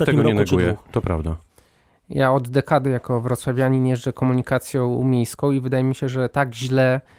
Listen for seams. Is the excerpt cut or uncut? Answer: uncut